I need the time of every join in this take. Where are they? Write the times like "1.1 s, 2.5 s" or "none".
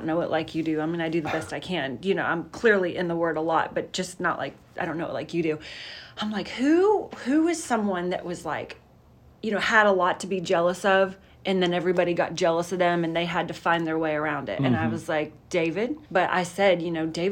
16.1 s